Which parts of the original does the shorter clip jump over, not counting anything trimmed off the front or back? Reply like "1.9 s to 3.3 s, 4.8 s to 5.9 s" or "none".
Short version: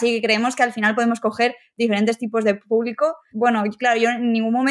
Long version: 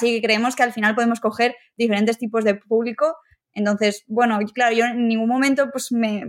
3.3 s to 4.0 s